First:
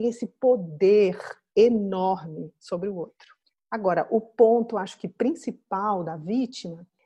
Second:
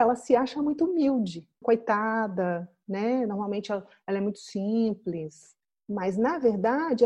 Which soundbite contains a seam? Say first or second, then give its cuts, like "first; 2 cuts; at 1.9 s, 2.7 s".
second; 1 cut; at 1.6 s